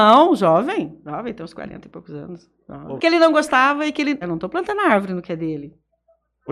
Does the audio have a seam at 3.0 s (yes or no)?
yes